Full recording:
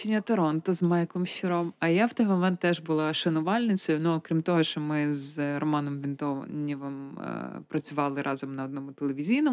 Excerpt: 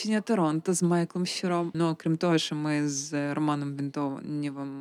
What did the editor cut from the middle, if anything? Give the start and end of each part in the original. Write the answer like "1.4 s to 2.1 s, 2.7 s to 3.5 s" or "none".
1.7 s to 4.0 s